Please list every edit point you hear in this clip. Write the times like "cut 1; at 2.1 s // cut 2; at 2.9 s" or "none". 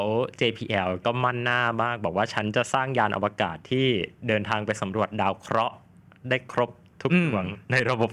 cut 1; at 1.0 s